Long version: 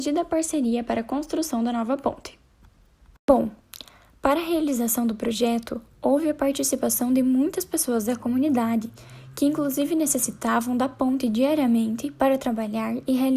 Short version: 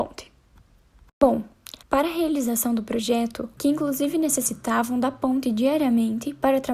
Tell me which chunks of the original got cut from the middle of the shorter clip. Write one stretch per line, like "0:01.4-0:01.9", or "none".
0:03.9-0:04.1
0:05.9-0:09.3

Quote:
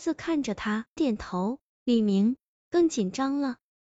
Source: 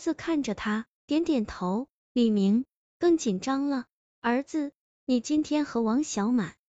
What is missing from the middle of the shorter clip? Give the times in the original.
0:01.0-0:01.3

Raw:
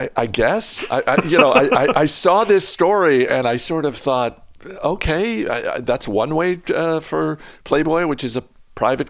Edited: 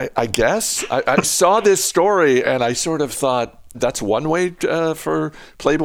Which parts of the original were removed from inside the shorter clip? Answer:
0:01.2-0:02.1
0:04.6-0:05.8

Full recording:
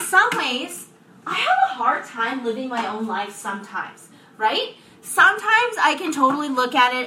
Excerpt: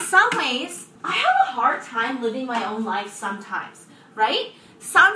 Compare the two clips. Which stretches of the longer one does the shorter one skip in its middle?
0:01.0-0:01.2

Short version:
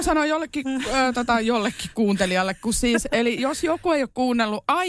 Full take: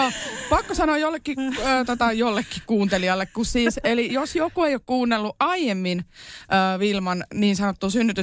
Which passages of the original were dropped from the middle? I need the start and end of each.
none

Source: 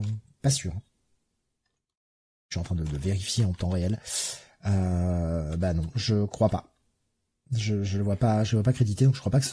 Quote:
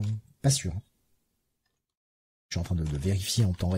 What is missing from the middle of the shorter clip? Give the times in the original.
none

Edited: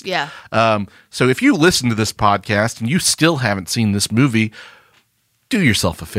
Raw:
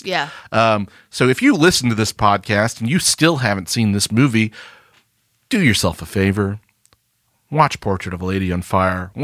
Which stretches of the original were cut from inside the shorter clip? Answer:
none

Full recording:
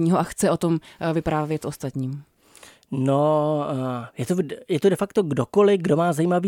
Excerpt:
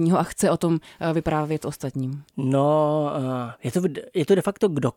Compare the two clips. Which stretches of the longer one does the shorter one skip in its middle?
0:02.3-0:02.8

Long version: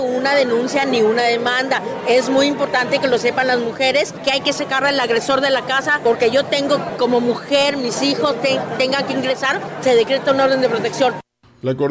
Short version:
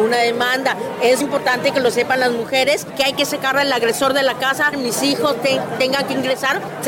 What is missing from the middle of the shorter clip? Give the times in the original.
0:02.3-0:02.5
0:06.0-0:07.7

